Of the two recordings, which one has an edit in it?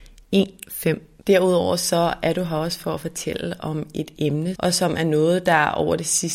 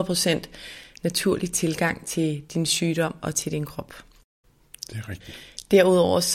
first; 2 cuts; at 1.2 s, 4.5 s

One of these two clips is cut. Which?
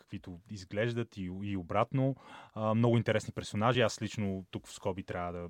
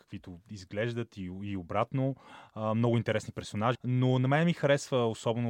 second; 1 cut; at 3.7 s

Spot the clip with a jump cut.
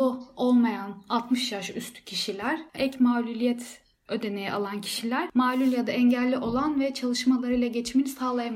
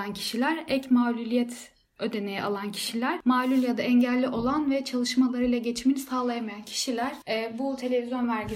first; 1 cut; at 2.8 s

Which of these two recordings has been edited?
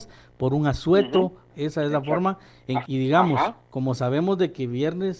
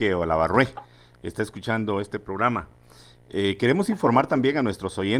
first; 2 cuts; at 1.5 s, 2.9 s

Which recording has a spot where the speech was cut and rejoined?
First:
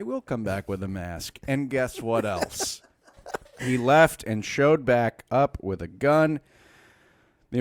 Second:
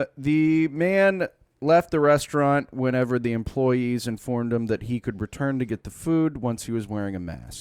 first; 1 cut; at 3.6 s

